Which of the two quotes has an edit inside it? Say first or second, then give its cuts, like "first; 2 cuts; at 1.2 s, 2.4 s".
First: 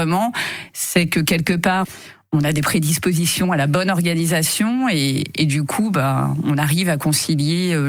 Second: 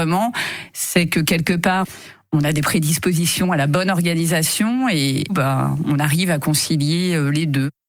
second; 1 cut; at 5.3 s